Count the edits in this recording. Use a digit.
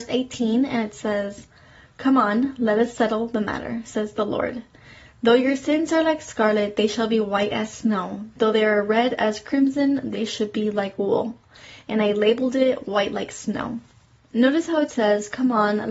0